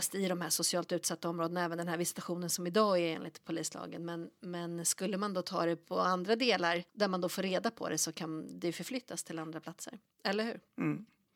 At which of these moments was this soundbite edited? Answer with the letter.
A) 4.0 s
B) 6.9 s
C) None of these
B